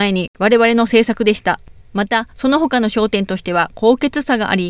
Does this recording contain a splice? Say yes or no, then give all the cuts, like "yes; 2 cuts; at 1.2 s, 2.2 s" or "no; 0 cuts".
yes; 1 cut; at 1.8 s